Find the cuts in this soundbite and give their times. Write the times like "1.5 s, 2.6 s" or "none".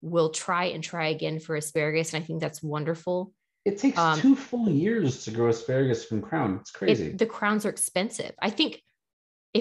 none

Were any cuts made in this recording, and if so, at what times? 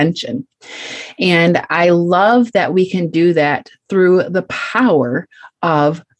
none

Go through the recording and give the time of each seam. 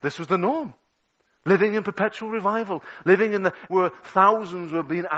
3.7 s

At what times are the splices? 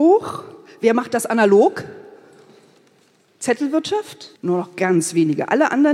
4.4 s

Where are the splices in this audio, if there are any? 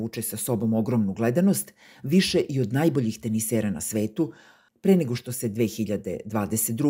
4.7 s

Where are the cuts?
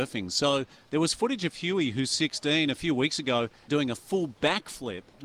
3.7 s

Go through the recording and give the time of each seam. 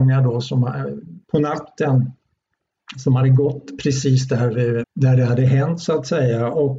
1.2 s, 4.8 s

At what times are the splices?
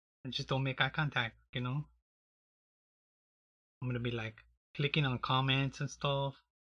3.7 s

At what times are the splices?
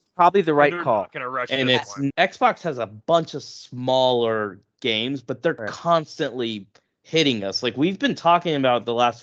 2.1 s

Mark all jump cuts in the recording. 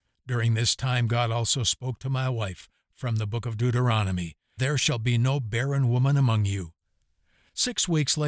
4.6 s

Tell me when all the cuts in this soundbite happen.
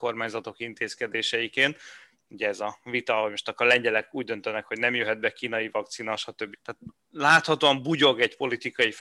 6.5 s

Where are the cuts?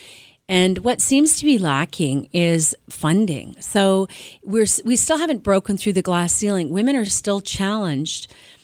none

